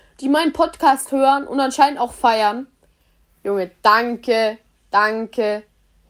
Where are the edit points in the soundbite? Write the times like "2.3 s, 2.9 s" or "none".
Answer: none